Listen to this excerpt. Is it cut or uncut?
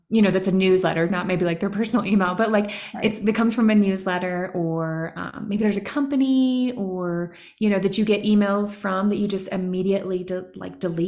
uncut